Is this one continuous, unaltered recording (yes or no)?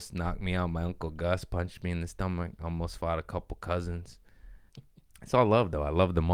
no